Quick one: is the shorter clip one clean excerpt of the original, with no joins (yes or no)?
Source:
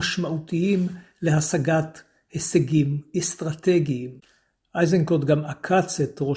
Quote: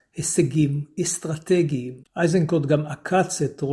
no